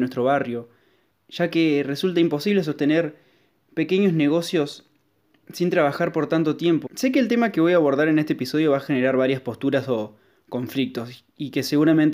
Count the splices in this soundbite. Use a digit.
1